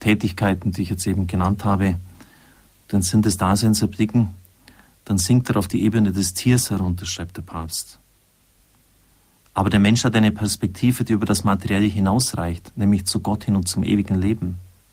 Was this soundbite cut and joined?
no; 0 cuts

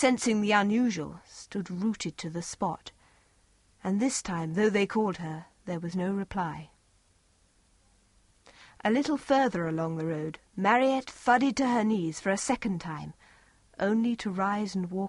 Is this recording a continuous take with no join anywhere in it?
yes; 0 cuts

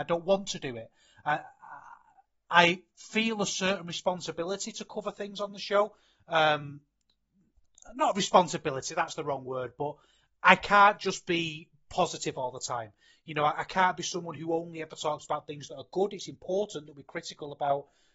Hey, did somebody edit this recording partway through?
no; 0 cuts

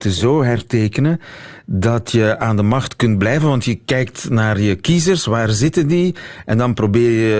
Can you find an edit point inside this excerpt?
no; 0 cuts

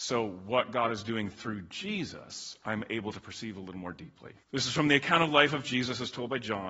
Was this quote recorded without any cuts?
no; 1 cut; at 4.4 s

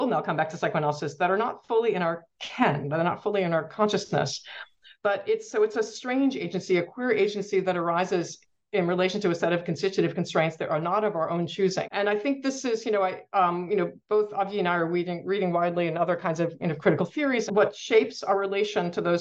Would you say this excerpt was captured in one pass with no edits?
no; 2 cuts; at 11.8 s, 17.5 s

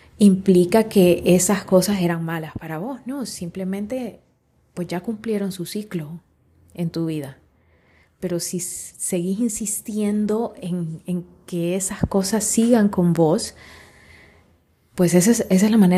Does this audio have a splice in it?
no; 0 cuts

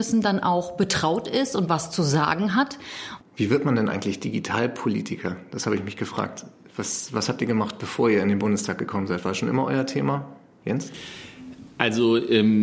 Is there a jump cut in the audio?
yes; 1 cut; at 3.2 s

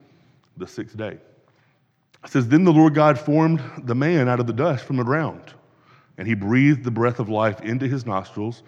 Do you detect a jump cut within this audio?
yes; 1 cut; at 2.1 s

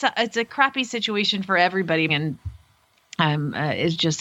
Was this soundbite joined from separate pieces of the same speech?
yes; 1 cut; at 2.1 s

